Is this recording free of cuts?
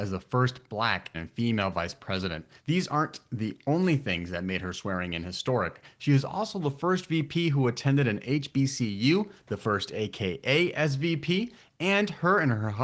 no; 1 cut; at 1.1 s

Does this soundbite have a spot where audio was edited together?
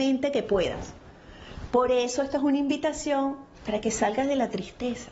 yes; 1 cut; at 3.5 s

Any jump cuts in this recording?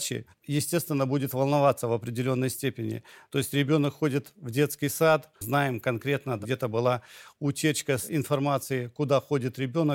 yes; 2 cuts; at 3.3 s, 5.4 s

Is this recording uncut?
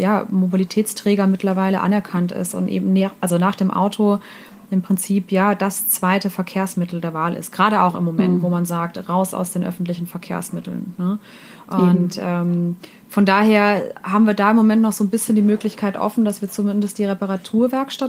yes; 0 cuts

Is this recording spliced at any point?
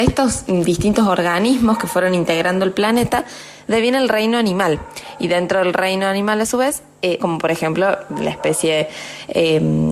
yes; 1 cut; at 7.2 s

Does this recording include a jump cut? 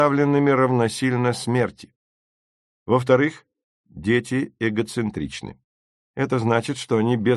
no; 0 cuts

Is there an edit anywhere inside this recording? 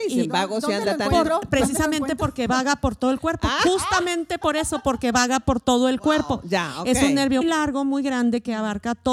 yes; 1 cut; at 7.4 s

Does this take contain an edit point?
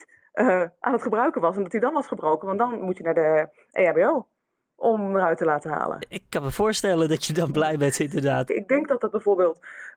yes; 1 cut; at 8.5 s

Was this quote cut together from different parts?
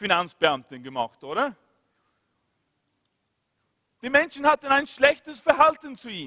no; 0 cuts

